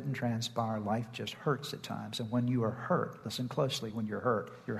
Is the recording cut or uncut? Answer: uncut